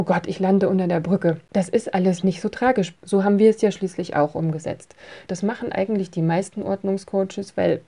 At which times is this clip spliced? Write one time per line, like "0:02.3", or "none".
0:03.0
0:05.3